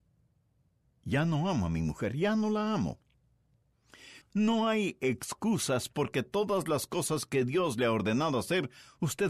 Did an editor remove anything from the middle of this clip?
yes; 1 cut; at 4.2 s

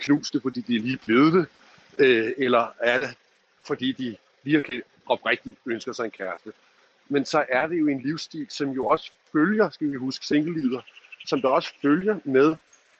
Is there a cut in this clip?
no; 0 cuts

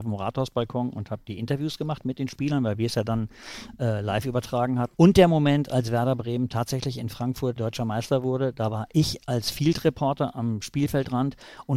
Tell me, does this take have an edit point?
yes; 2 cuts; at 4.9 s, 7.6 s

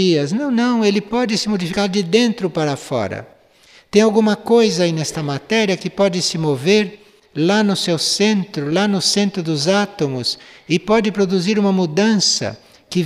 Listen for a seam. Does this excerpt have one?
no; 0 cuts

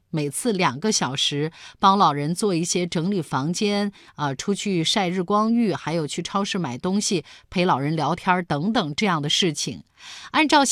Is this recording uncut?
yes; 0 cuts

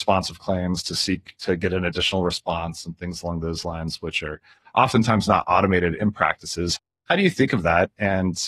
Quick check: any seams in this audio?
no; 0 cuts

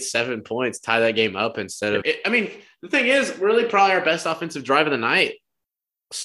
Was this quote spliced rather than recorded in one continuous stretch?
yes; 1 cut; at 2.0 s

